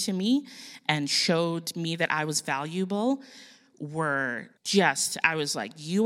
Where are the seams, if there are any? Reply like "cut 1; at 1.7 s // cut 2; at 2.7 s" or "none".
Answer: cut 1; at 4.6 s